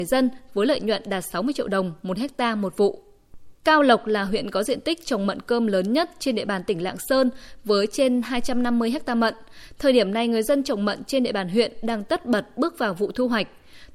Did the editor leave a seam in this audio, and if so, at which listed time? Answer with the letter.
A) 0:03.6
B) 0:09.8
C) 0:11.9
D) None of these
A